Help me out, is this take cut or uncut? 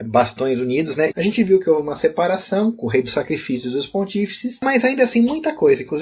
cut